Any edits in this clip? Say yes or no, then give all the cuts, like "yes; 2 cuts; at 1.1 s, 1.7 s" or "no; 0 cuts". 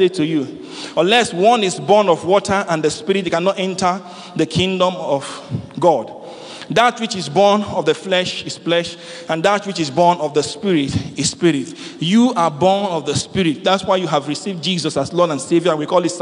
no; 0 cuts